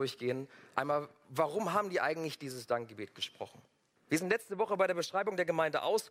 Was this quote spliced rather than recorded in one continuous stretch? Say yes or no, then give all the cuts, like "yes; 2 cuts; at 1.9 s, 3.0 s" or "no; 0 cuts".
yes; 1 cut; at 4.0 s